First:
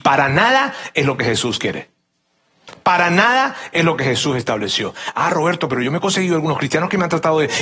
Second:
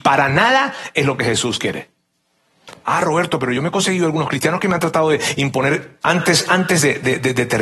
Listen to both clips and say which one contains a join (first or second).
second